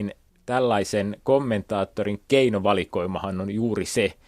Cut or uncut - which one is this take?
uncut